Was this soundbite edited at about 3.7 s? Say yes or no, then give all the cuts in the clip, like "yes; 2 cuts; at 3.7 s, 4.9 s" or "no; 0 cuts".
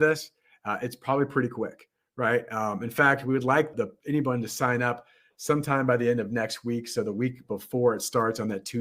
yes; 1 cut; at 3.7 s